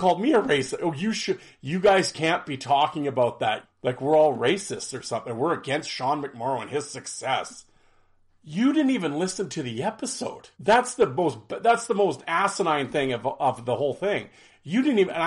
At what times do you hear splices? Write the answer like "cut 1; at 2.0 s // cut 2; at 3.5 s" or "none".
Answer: cut 1; at 3.6 s // cut 2; at 8.3 s // cut 3; at 10.5 s